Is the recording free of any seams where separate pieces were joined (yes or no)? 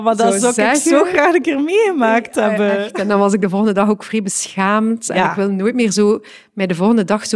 yes